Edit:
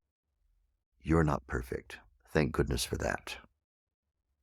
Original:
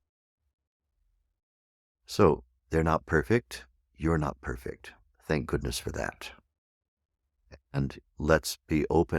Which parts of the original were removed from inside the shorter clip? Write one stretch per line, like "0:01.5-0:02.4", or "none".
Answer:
0:01.5-0:03.9